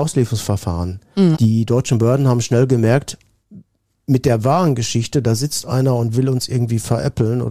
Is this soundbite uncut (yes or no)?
no